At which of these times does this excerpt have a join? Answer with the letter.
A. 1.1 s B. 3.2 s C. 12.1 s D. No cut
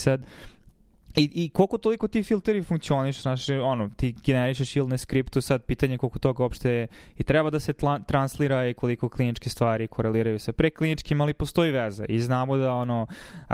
B